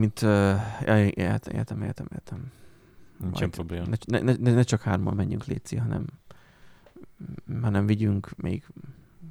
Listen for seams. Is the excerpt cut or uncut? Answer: uncut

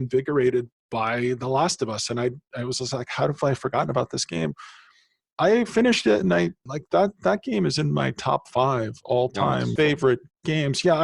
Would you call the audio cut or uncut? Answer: cut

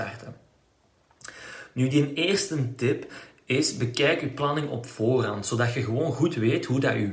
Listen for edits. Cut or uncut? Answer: uncut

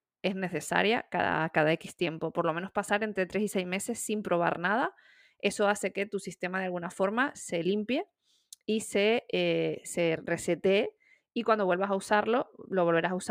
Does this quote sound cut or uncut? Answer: uncut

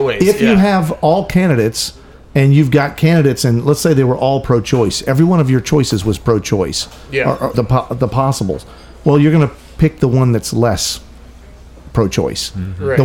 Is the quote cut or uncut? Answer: cut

